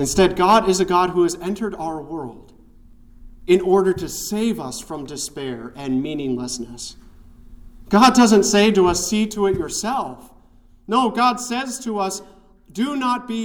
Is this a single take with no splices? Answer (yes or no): yes